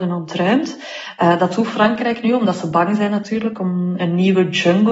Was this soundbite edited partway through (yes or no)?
no